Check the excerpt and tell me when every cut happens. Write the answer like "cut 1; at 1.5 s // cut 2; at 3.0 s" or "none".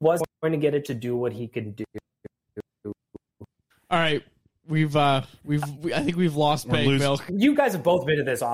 cut 1; at 7.3 s